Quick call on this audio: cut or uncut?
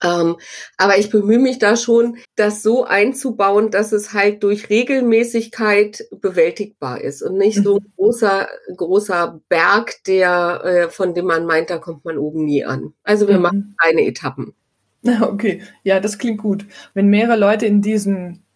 cut